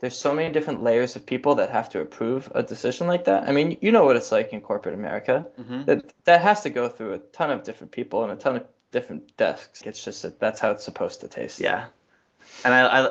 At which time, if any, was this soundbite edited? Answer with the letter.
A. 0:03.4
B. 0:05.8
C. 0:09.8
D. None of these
C